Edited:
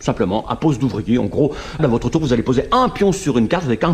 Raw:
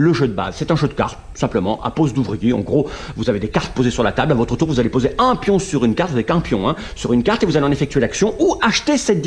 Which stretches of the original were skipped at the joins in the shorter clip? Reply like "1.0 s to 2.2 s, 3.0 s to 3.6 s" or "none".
3.1 s to 4.3 s

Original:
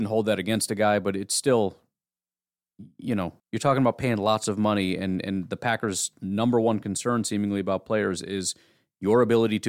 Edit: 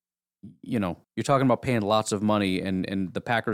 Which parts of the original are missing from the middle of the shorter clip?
none

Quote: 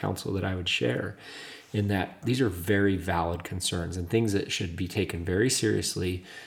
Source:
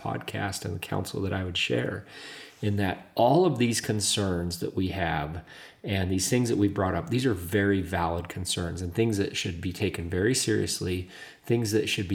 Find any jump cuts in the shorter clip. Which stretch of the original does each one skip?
3.1 s to 7.1 s

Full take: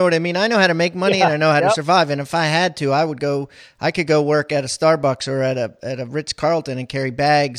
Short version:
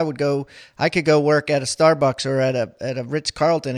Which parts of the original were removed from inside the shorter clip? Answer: none

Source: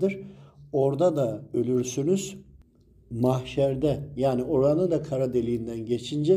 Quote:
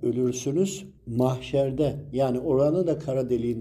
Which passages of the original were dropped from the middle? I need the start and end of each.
2.5 s to 3.0 s

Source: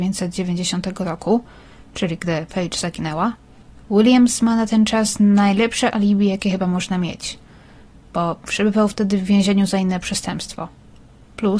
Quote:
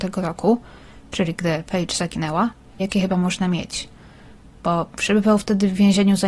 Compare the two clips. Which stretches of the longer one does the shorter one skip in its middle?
3.6 s to 6.3 s

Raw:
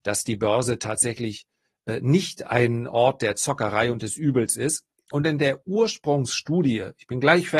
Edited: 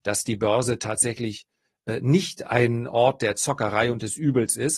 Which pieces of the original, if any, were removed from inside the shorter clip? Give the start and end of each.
none

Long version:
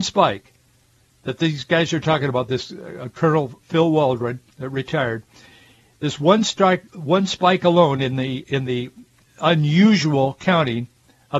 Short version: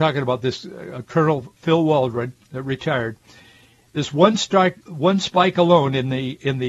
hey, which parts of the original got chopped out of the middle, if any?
none

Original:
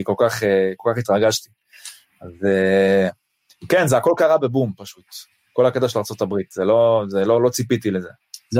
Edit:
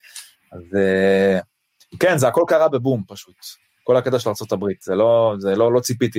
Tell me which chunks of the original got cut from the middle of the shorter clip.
none

